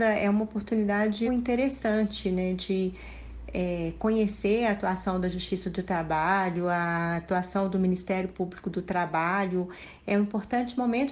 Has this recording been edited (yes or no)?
yes